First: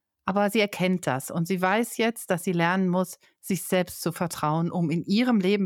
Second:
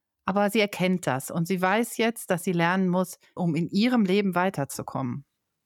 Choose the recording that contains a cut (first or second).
second